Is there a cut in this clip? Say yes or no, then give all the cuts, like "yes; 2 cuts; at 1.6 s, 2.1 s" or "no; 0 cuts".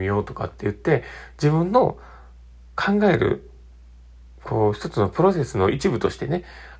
no; 0 cuts